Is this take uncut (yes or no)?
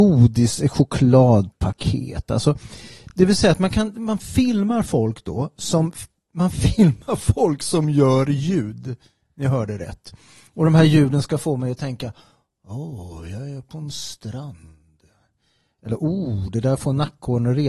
yes